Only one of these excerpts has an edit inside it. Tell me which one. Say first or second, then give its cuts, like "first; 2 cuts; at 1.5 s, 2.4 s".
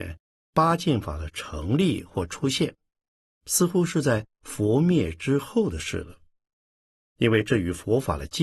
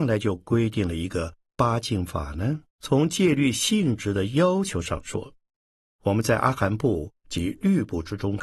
second; 2 cuts; at 2.7 s, 5.9 s